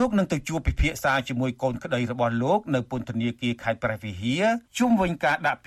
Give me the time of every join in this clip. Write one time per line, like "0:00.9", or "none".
0:04.7